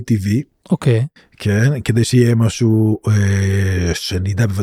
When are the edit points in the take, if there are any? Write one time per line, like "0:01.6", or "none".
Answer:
none